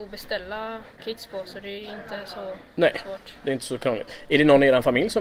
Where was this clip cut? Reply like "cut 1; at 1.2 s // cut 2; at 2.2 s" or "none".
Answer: cut 1; at 0.9 s